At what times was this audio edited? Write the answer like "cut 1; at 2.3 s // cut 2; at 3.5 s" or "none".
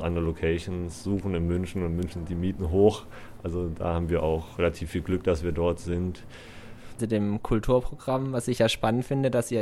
cut 1; at 7.0 s